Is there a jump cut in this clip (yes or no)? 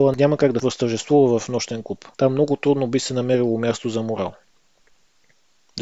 yes